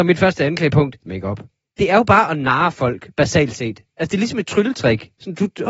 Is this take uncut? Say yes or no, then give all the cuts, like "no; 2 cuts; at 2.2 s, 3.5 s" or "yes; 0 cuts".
no; 1 cut; at 1.1 s